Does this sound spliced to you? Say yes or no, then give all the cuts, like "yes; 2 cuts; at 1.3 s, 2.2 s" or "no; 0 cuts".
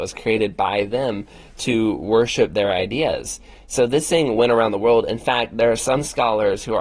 no; 0 cuts